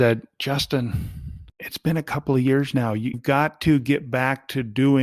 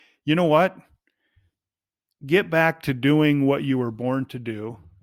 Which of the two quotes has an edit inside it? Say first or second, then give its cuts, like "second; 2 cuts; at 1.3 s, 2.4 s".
first; 1 cut; at 3.1 s